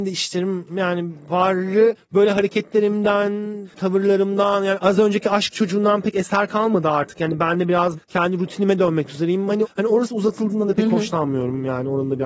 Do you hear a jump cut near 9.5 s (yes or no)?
no